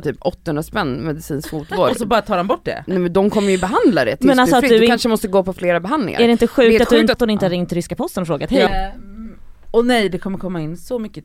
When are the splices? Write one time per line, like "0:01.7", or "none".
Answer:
0:07.1
0:08.7